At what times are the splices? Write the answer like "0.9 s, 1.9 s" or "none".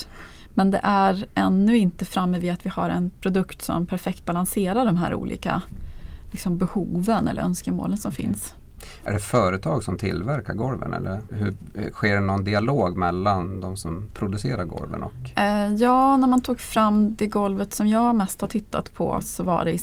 11.3 s